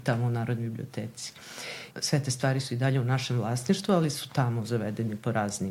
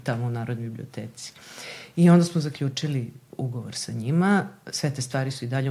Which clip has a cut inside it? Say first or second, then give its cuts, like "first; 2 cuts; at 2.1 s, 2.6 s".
first; 1 cut; at 1.9 s